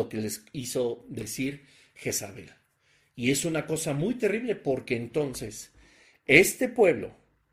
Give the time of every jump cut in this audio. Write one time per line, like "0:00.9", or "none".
none